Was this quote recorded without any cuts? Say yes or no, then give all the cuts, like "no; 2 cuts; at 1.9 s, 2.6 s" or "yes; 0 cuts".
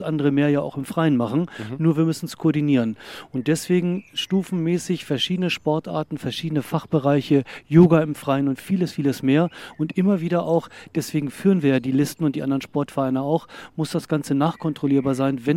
yes; 0 cuts